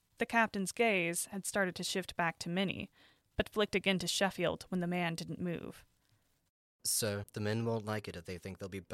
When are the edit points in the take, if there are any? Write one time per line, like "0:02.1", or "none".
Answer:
0:07.2